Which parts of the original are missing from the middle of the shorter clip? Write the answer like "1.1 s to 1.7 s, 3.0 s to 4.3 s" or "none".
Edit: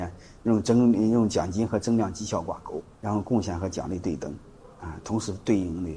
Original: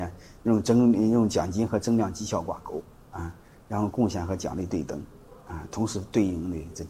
3.0 s to 3.6 s